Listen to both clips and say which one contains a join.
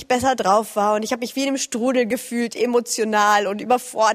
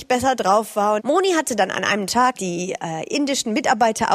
second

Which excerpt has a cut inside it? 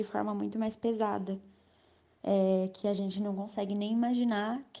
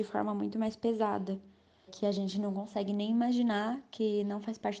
second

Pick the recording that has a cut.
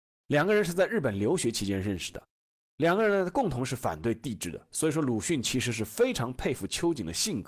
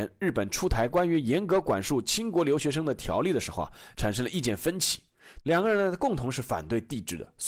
second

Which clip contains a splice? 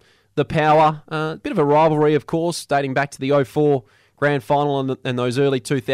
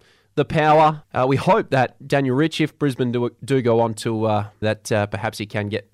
second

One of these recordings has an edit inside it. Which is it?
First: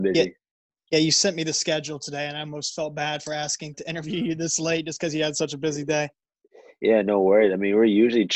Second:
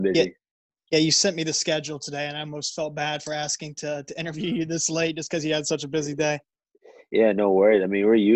first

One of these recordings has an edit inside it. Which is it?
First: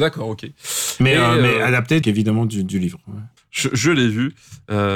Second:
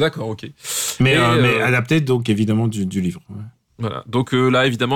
first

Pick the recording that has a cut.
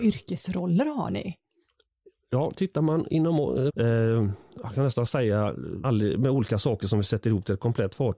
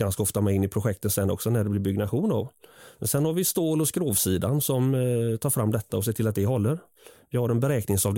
first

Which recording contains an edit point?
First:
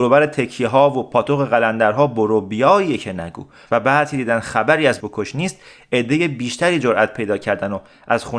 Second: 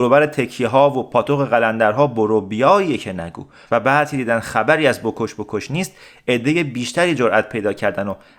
first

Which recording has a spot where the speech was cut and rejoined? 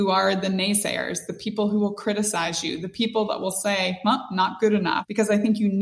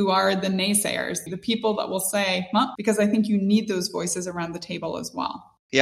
second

